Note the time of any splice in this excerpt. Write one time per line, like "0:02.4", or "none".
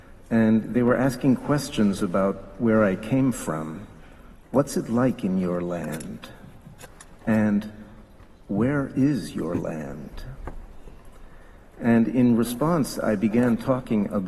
0:04.4

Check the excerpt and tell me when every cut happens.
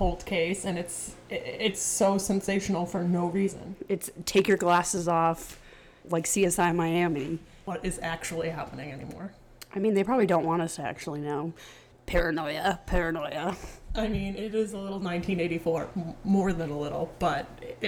0:06.0

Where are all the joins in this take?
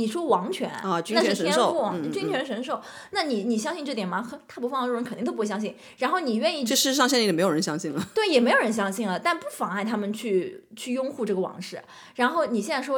none

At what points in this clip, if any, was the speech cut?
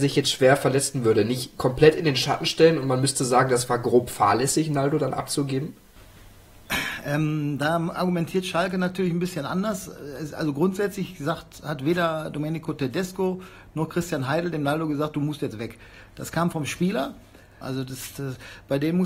0:17.6

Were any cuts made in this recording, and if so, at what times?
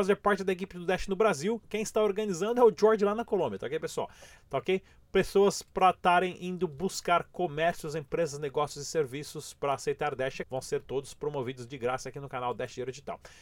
0:04.4
0:10.4

